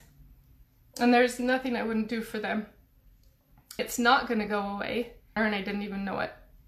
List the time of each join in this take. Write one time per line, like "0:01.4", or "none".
0:03.8
0:05.4

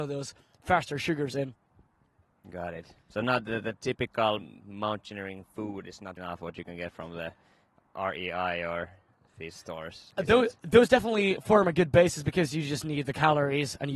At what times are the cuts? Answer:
0:03.0
0:06.2

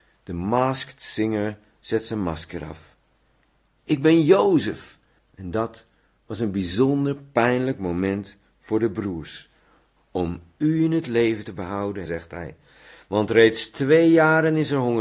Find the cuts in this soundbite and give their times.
0:05.2
0:10.0
0:12.1

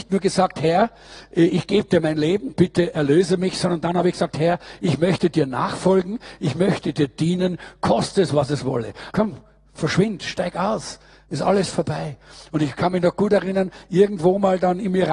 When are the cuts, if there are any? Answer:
0:09.1

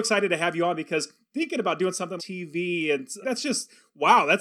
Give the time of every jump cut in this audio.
0:02.2
0:03.2

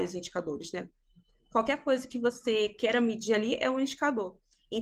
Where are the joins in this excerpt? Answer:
none

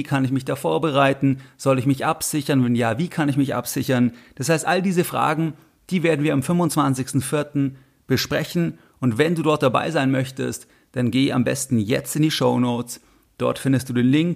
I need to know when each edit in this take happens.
none

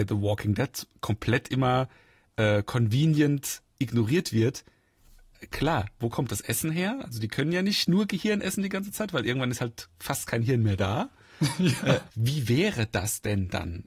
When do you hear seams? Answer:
0:12.1

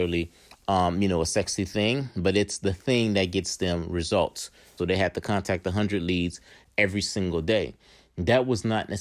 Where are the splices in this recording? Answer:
0:04.8

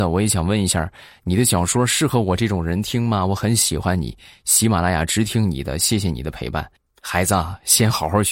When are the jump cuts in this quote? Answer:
none

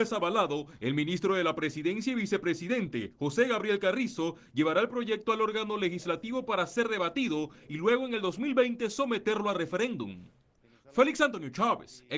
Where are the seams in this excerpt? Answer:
none

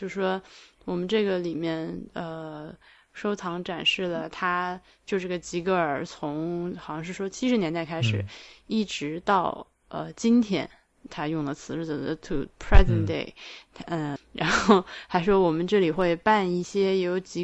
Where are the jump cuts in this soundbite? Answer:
0:14.2

